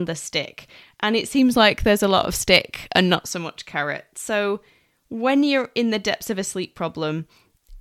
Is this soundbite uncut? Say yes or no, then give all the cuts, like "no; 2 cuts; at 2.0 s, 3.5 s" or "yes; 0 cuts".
yes; 0 cuts